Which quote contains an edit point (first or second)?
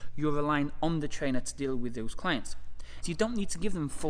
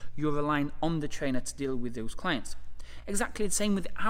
first